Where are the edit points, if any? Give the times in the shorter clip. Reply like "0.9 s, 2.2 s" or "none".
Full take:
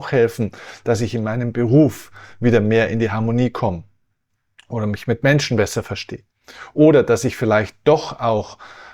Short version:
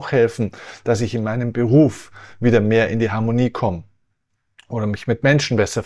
none